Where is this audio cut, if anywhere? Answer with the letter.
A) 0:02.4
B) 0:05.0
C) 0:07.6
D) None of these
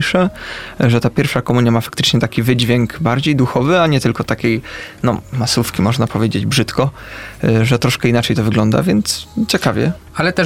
D